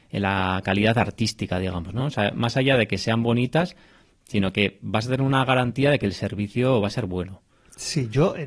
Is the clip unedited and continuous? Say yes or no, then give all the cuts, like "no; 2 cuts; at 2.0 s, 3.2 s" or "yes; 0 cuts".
no; 1 cut; at 2.0 s